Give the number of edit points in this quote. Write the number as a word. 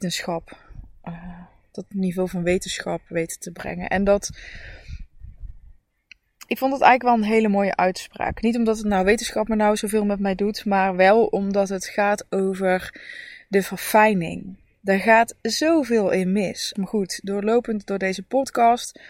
one